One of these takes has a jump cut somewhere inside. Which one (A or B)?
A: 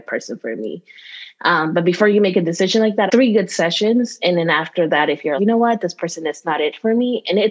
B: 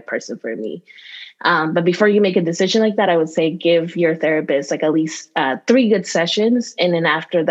A